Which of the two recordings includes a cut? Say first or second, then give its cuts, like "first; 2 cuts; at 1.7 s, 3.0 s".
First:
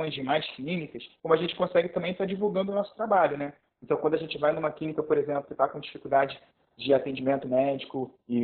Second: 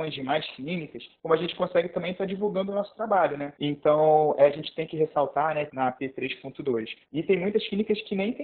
second; 3 cuts; at 3.6 s, 5.7 s, 7.0 s